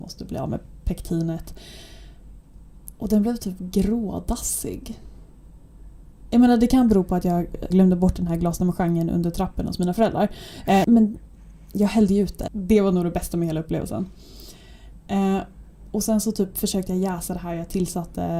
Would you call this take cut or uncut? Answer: cut